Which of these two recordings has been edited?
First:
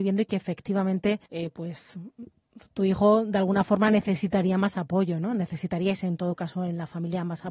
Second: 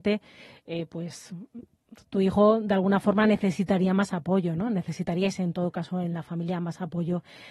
first; 1 cut; at 1.3 s

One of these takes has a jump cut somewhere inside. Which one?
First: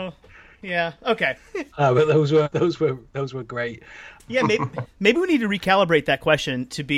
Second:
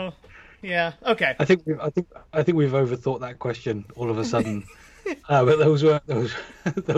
first; 3 cuts; at 1.4 s, 2.5 s, 4.2 s

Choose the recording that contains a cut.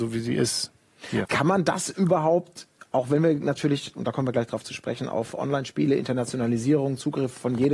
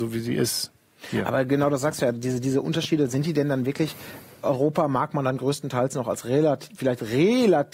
first; 1 cut; at 1.2 s

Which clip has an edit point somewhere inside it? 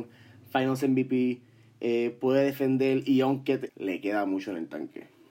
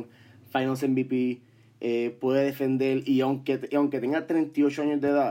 first; 1 cut; at 3.7 s

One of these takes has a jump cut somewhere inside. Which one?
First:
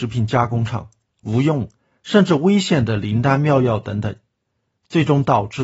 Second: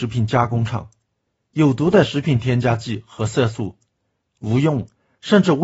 first; 1 cut; at 1.1 s

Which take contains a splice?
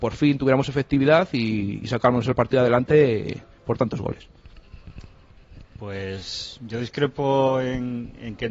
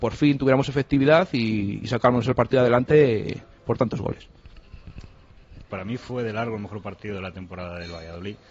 second; 1 cut; at 5.7 s

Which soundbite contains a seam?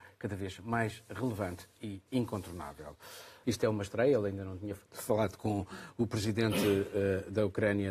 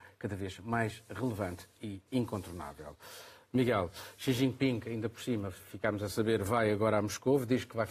first; 2 cuts; at 3.4 s, 4.8 s

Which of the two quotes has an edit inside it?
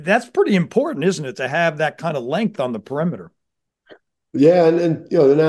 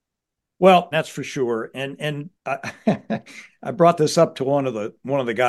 second; 2 cuts; at 0.9 s, 2.4 s

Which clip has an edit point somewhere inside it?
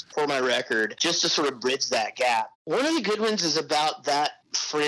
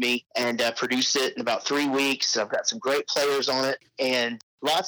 first; 1 cut; at 2.5 s

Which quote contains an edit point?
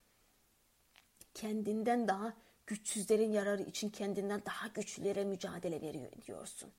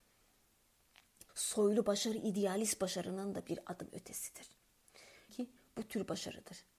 second; 2 cuts; at 1.3 s, 5.3 s

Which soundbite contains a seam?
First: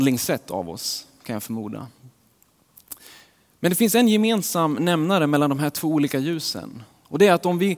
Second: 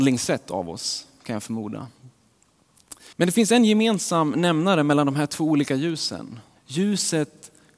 second; 2 cuts; at 3.1 s, 6.5 s

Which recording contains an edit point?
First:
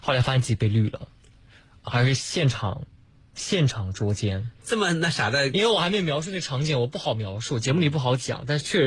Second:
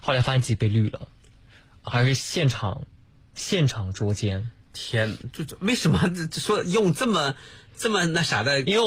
first; 1 cut; at 4.5 s

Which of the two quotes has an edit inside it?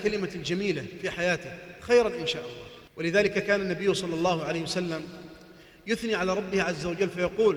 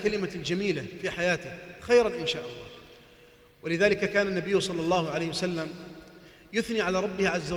first; 1 cut; at 2.9 s

